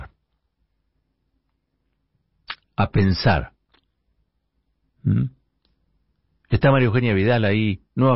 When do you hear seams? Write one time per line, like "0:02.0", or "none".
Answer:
0:02.6